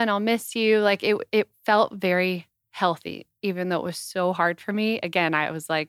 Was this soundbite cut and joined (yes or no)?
no